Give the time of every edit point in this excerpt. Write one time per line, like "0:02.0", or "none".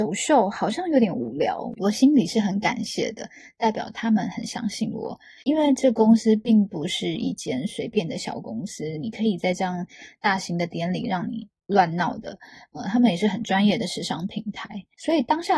0:01.8